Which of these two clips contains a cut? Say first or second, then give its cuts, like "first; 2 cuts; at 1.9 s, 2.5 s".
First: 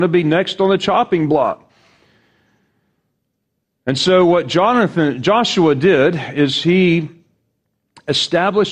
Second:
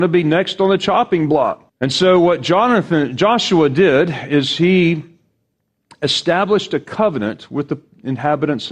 second; 1 cut; at 1.7 s